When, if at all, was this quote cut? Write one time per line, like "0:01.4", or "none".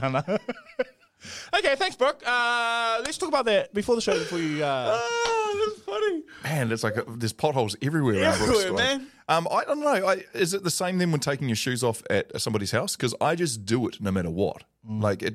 none